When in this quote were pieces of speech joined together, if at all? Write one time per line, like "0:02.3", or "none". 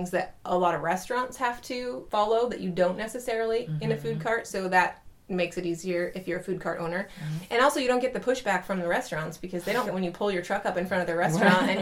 0:09.8